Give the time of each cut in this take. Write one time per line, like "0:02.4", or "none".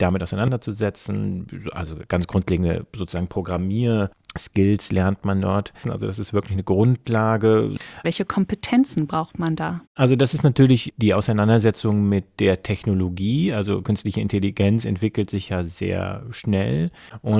0:05.8
0:08.0